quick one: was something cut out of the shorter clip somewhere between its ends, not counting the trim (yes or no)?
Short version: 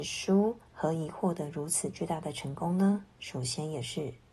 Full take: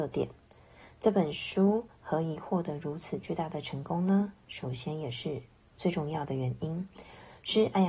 no